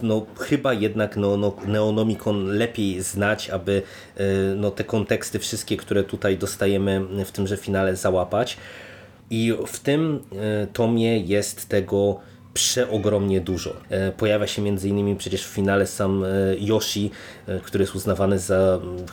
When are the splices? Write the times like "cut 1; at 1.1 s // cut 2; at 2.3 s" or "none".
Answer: cut 1; at 9.2 s // cut 2; at 13.8 s // cut 3; at 17.6 s